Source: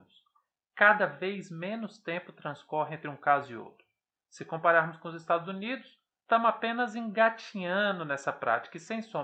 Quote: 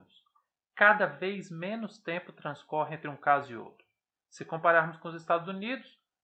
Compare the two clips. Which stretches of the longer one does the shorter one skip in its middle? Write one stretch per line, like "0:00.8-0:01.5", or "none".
none